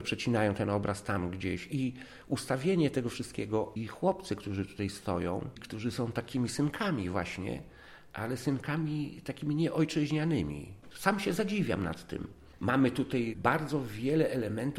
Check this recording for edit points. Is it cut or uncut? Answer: cut